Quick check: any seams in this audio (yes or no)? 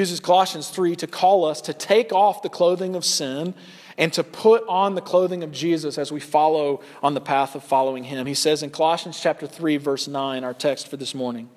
no